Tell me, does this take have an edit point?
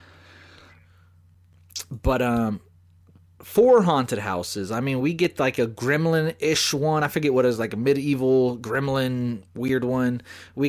no; 0 cuts

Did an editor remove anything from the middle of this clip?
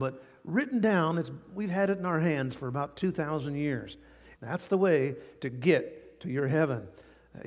yes; 1 cut; at 4.4 s

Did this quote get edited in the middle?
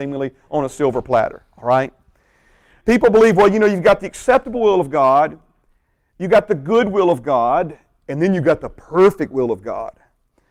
yes; 1 cut; at 2.8 s

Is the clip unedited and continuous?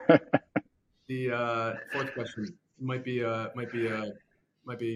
yes; 0 cuts

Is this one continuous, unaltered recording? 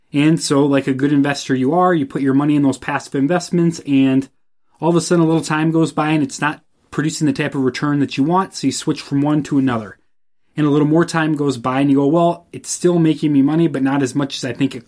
yes; 0 cuts

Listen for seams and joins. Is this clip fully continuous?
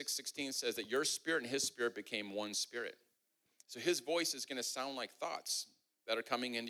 yes; 0 cuts

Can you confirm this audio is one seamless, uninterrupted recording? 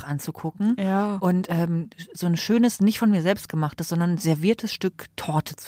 yes; 0 cuts

